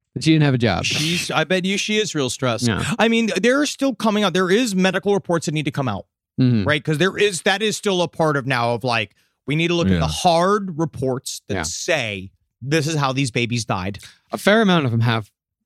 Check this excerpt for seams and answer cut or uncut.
uncut